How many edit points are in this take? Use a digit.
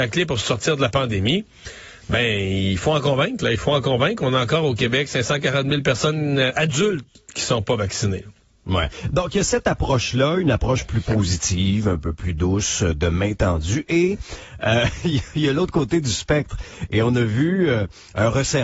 0